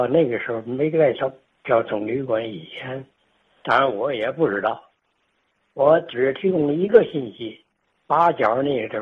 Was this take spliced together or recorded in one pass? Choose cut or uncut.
cut